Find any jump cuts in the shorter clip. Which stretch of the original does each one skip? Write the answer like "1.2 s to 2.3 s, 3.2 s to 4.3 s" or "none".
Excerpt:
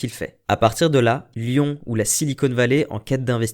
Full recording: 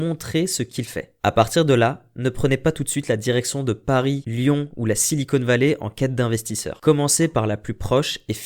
2.1 s to 4.2 s